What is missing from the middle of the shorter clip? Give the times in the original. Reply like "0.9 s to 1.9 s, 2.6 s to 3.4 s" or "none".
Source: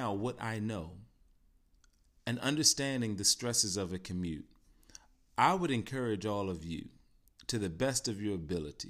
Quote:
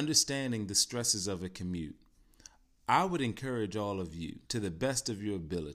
6.9 s to 7.4 s

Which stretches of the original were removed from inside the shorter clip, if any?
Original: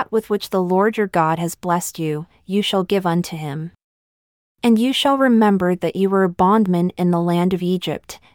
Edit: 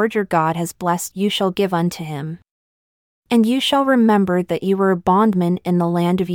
1.9 s to 2.4 s

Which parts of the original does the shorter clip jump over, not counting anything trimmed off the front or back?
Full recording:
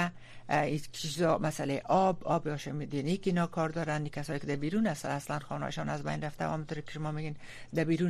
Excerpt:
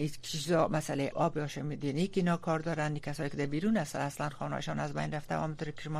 1.8 s to 2.2 s

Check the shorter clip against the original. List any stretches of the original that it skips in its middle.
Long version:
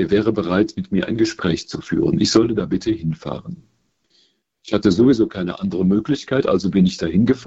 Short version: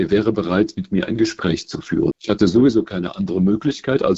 2.1 s to 4.6 s

